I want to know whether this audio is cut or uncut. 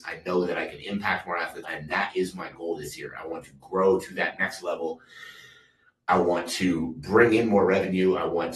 cut